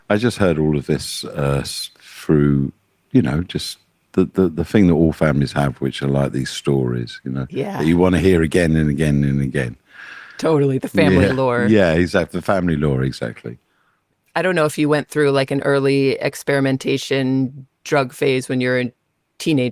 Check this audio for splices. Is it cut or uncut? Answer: uncut